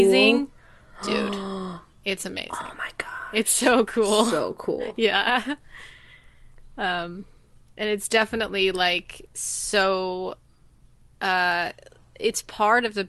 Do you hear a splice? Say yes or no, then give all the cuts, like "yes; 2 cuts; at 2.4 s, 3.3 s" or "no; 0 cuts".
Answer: no; 0 cuts